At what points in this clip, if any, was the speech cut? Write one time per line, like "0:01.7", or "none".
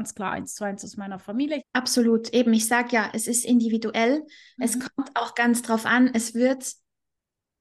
0:01.6

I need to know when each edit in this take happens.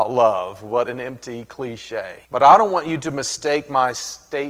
0:02.2

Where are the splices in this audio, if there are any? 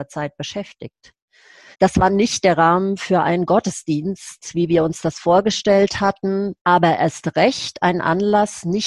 0:01.7
0:06.6

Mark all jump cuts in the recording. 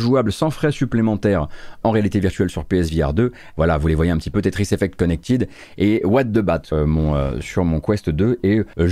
0:01.8
0:03.5
0:06.7

